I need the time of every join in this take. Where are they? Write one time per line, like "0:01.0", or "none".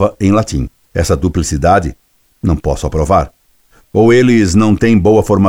0:03.8